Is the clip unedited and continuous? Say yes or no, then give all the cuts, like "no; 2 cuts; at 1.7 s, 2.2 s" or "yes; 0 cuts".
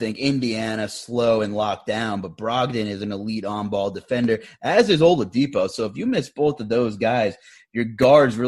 yes; 0 cuts